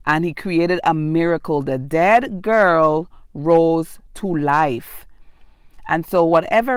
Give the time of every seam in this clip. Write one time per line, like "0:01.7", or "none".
none